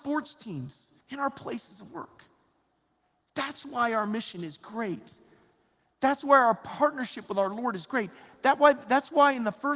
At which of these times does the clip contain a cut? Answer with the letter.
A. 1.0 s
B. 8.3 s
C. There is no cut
A